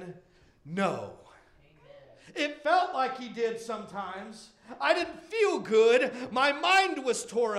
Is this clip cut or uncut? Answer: uncut